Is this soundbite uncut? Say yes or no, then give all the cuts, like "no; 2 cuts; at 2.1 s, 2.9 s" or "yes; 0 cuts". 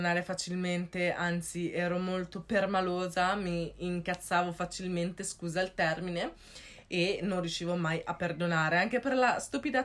yes; 0 cuts